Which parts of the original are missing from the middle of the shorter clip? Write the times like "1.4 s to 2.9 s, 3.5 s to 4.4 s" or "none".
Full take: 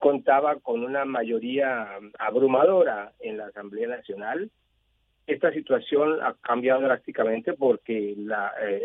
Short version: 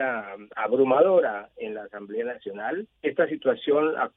4.6 s to 5.2 s